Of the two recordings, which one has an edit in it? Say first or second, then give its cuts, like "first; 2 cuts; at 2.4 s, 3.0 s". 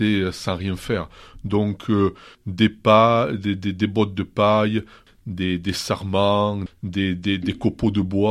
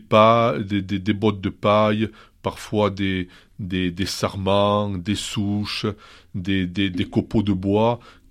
first; 3 cuts; at 2.3 s, 5.1 s, 6.7 s